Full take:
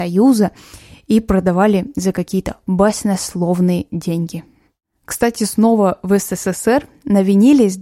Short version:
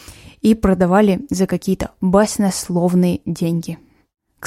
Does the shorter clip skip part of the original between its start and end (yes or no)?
no